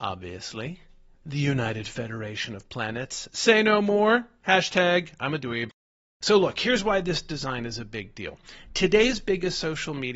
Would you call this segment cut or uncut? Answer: uncut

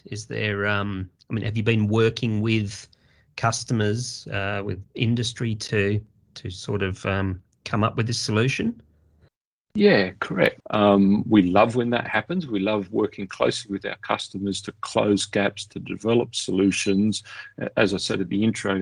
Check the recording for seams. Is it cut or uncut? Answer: cut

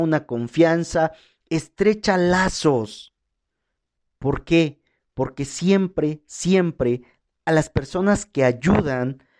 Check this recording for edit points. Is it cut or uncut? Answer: uncut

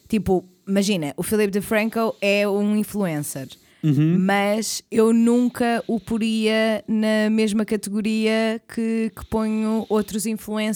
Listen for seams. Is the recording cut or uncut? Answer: uncut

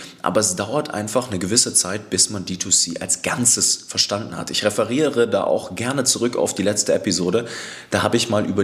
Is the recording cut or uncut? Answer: uncut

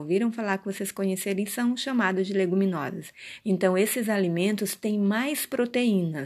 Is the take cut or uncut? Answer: cut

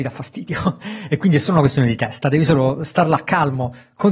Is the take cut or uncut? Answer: uncut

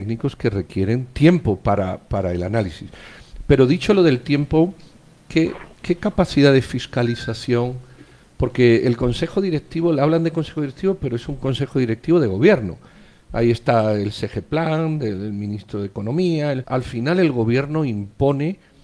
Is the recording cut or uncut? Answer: cut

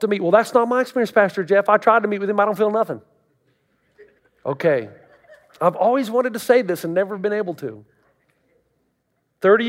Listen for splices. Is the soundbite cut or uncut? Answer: uncut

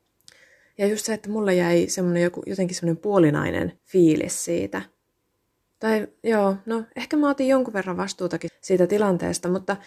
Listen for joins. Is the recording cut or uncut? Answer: cut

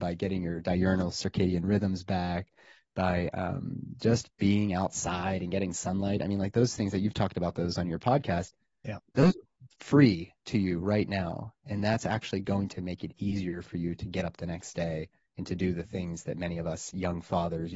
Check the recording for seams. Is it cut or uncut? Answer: uncut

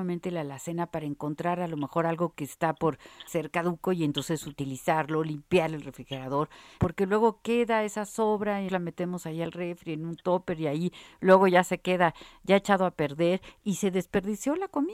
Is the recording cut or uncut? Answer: cut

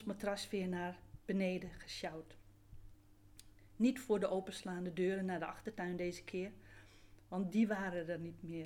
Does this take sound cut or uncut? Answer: uncut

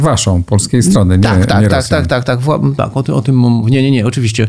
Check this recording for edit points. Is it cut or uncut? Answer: uncut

